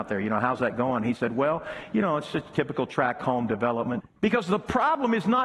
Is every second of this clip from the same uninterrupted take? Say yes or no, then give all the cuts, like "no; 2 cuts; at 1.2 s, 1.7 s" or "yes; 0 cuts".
no; 1 cut; at 4.0 s